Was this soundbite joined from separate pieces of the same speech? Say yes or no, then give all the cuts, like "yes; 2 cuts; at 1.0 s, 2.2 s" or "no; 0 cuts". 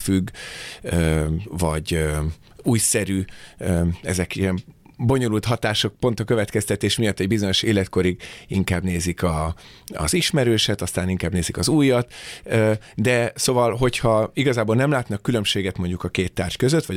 yes; 1 cut; at 7.6 s